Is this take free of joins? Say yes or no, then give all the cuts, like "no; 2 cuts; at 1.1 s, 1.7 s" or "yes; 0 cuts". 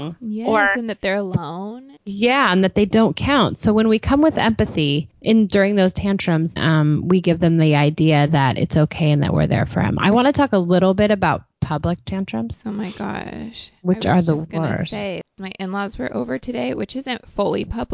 no; 2 cuts; at 2.0 s, 6.6 s